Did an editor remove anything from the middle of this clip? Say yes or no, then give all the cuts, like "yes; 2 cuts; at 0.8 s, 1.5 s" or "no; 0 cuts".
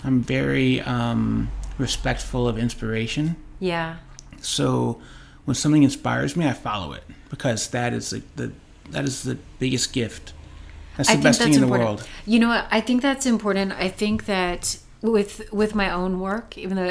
no; 0 cuts